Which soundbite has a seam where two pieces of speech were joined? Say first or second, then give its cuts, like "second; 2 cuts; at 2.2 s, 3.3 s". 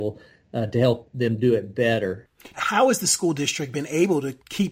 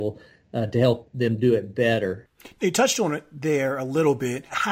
first; 1 cut; at 2.5 s